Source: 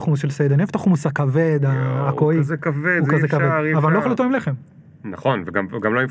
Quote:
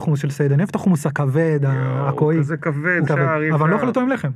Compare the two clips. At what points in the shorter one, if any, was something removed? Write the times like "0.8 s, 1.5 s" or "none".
3.1 s